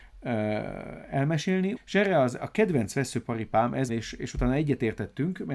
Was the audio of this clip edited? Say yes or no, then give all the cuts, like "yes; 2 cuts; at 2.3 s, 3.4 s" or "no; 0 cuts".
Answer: yes; 2 cuts; at 1.8 s, 3.9 s